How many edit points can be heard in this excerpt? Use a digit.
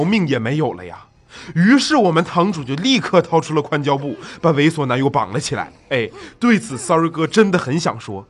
0